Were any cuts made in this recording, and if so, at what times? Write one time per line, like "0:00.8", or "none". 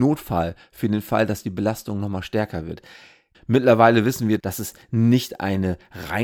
0:03.3
0:04.4